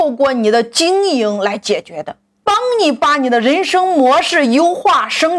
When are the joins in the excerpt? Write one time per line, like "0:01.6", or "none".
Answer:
0:02.4